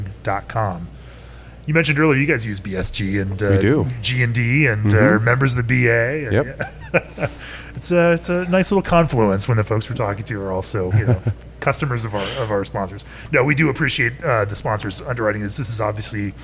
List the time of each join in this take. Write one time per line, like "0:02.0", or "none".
0:10.9